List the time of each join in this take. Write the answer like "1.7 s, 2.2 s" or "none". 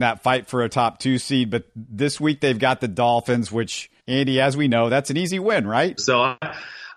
4.0 s, 6.0 s